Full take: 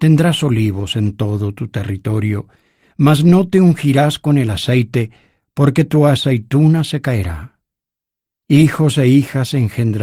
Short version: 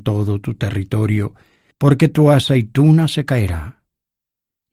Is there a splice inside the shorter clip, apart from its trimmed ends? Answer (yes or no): yes